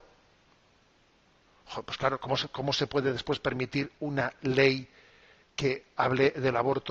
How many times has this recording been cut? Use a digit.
0